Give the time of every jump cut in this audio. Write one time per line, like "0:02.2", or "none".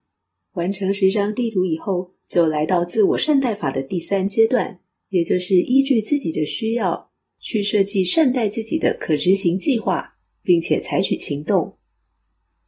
none